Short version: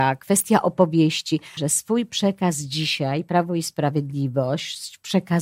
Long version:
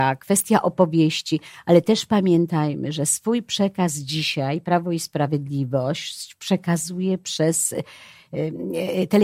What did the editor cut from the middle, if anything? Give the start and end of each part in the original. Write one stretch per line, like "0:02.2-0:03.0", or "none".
0:01.6-0:02.9